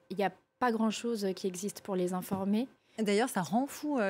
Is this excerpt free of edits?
no; 1 cut; at 2.9 s

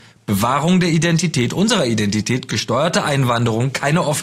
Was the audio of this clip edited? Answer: no; 0 cuts

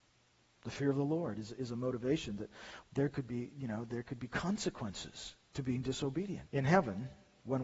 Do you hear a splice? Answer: yes; 2 cuts; at 2.8 s, 6.5 s

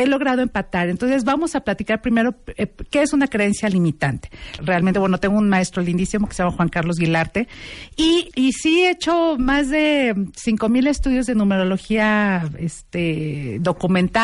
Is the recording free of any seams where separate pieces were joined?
no; 2 cuts; at 4.6 s, 8.3 s

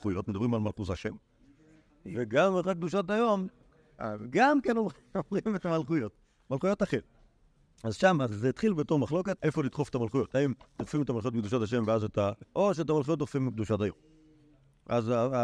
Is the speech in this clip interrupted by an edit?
yes; 2 cuts; at 9.4 s, 12.4 s

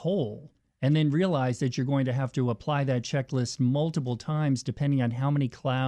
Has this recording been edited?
no; 0 cuts

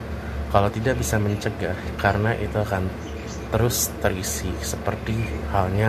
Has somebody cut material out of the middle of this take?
yes; 1 cut; at 2.0 s

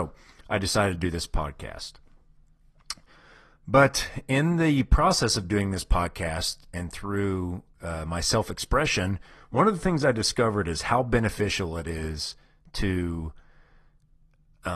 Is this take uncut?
yes; 0 cuts

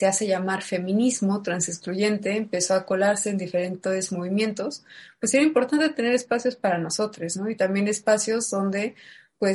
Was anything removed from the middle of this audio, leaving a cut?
no; 0 cuts

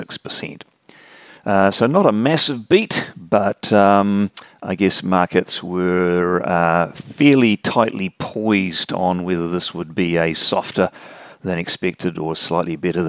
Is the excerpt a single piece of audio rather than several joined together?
no; 1 cut; at 1.3 s

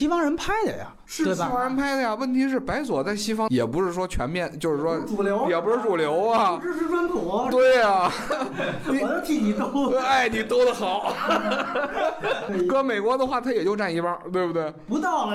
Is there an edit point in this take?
no; 0 cuts

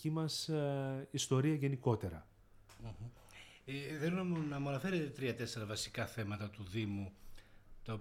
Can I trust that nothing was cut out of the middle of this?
yes; 0 cuts

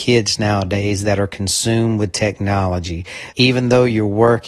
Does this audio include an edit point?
yes; 1 cut; at 3.3 s

